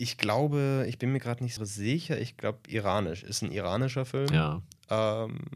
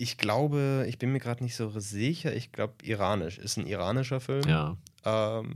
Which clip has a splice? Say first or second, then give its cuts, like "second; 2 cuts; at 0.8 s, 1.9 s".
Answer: first; 1 cut; at 1.6 s